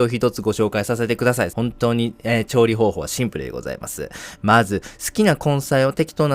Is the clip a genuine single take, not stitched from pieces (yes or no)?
no